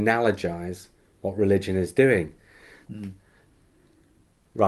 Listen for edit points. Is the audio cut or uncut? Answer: cut